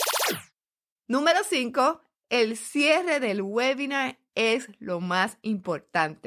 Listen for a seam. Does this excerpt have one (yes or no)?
no